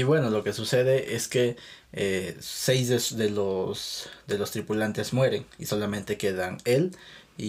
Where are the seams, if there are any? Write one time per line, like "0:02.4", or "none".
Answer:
none

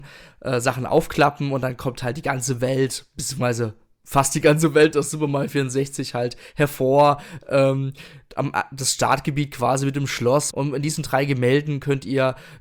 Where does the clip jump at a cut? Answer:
0:10.5

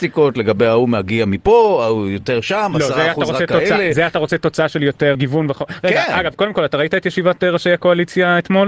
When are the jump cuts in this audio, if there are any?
0:05.1

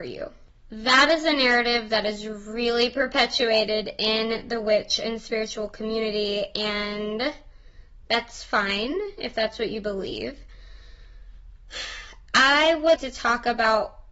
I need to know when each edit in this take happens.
0:08.0
0:13.0

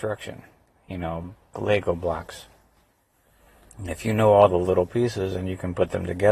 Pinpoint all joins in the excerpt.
0:01.5

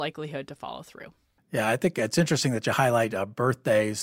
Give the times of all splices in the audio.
none

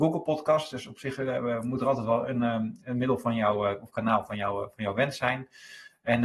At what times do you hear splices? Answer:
none

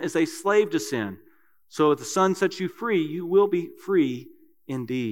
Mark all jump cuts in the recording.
none

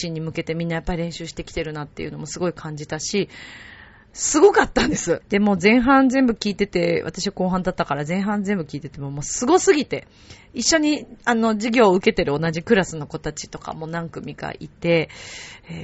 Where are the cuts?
0:05.2

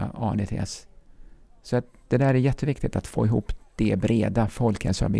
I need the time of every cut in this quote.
none

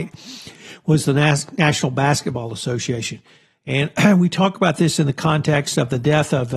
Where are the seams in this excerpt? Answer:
none

